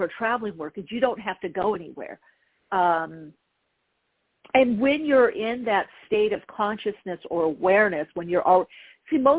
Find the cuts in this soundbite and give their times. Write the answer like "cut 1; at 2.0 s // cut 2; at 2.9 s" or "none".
cut 1; at 2.7 s